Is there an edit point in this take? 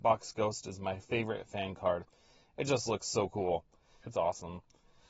yes; 1 cut; at 4.0 s

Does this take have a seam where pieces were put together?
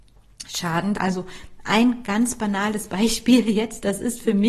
yes; 1 cut; at 0.9 s

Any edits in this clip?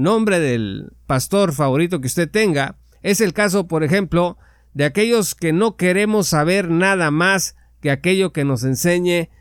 yes; 1 cut; at 2.9 s

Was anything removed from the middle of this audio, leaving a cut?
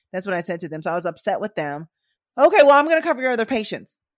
yes; 1 cut; at 2.2 s

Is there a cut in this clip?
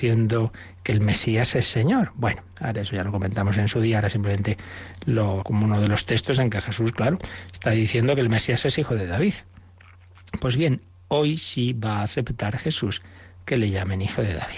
yes; 1 cut; at 5.4 s

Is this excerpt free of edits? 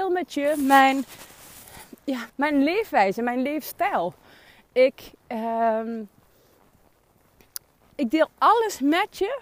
no; 1 cut; at 2.3 s

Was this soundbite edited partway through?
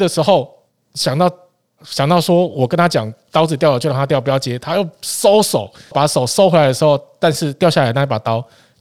yes; 1 cut; at 5.9 s

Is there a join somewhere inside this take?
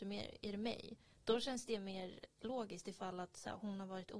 no; 0 cuts

